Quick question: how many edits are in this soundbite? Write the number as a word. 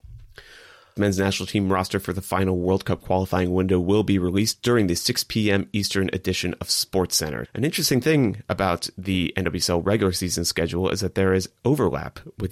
two